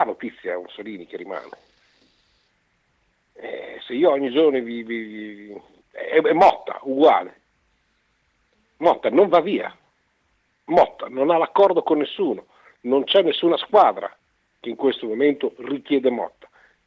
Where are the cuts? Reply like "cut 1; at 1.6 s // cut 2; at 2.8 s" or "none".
none